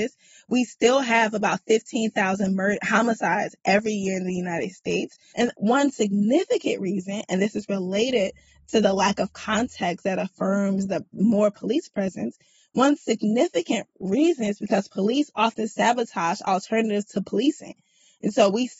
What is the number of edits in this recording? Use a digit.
1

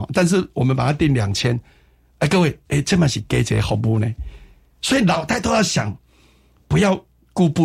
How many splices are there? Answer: 0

